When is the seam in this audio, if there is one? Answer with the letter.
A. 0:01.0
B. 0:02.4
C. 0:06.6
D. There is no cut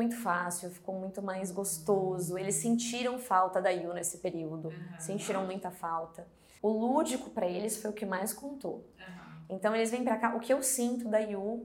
C